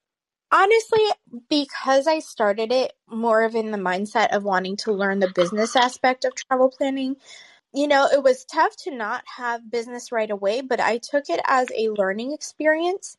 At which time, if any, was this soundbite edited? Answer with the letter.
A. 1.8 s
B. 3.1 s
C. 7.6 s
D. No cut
C